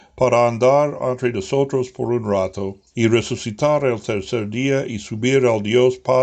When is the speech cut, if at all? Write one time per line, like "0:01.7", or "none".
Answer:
0:02.9

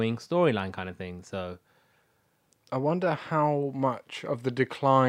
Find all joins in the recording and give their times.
none

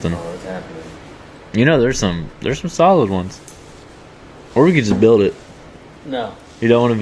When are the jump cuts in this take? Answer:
none

